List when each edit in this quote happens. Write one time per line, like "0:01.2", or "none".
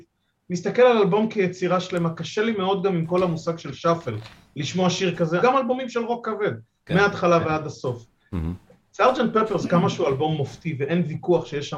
0:05.4